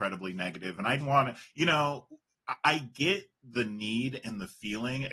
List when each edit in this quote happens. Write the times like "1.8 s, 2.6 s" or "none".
1.0 s